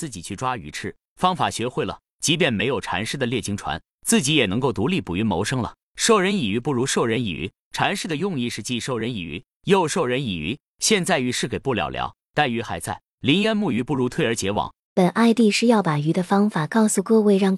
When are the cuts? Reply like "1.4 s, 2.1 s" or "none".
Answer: 14.9 s